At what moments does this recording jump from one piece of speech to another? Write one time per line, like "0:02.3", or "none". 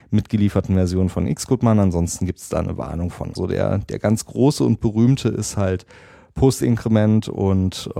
0:03.4